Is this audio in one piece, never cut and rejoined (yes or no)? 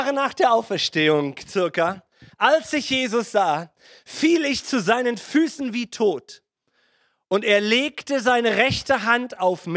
yes